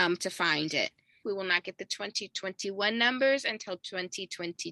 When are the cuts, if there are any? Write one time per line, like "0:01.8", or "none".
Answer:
0:01.2